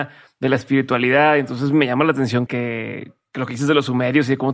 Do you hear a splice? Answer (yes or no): yes